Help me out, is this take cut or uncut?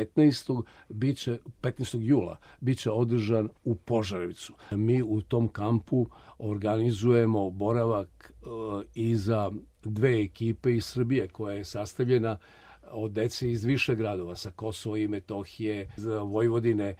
uncut